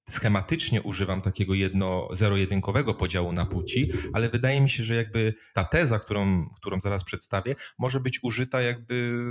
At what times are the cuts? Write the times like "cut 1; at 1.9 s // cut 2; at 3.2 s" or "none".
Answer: none